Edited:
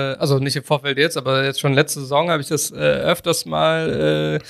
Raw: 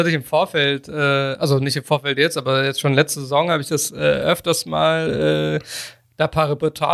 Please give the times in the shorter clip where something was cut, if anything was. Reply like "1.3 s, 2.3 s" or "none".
none